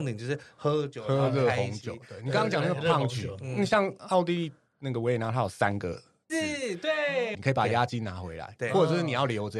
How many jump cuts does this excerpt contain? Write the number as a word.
two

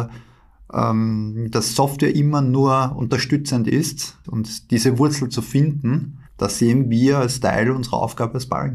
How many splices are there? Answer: two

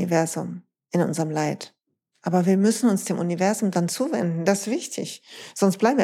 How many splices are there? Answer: zero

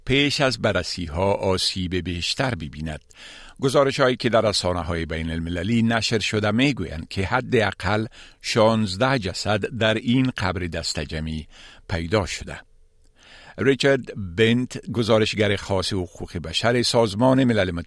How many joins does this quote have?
zero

